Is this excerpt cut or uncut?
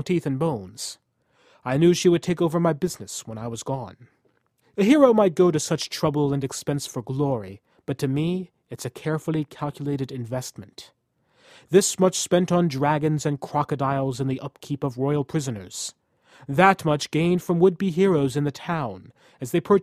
cut